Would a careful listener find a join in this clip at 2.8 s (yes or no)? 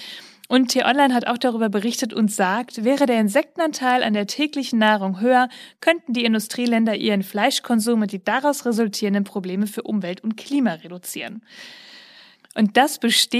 no